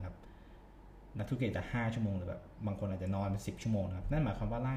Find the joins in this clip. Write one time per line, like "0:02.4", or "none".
none